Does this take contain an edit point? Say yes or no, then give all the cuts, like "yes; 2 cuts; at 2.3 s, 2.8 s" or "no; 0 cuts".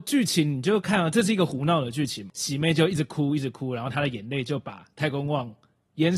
no; 0 cuts